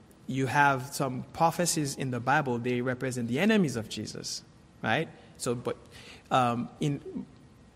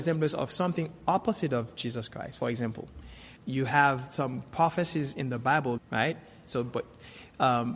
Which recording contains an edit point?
second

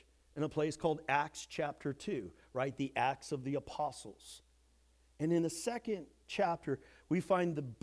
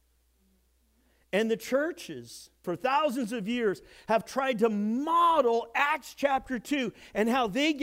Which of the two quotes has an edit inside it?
second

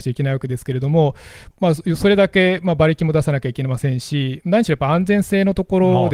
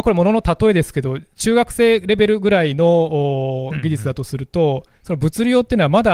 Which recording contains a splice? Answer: first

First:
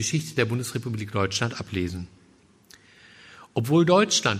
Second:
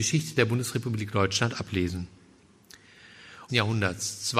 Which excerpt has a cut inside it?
second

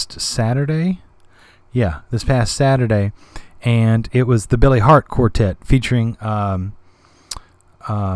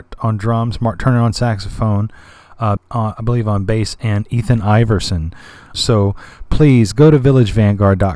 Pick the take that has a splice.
second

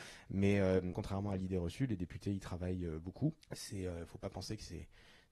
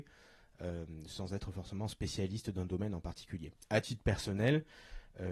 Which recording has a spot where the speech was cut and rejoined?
first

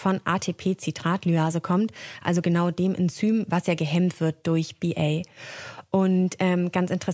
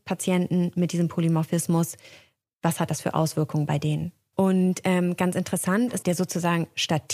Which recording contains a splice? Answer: second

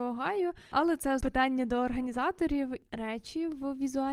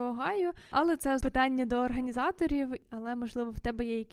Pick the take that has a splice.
first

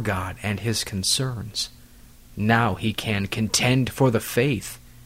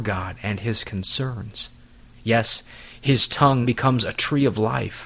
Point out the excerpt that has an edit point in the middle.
second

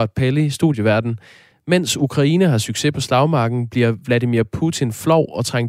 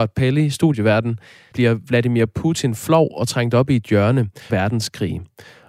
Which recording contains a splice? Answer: second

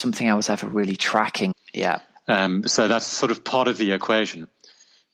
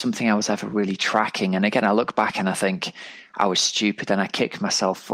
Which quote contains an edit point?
first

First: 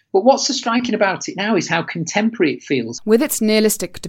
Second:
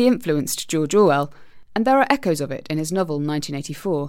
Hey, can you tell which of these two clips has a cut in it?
first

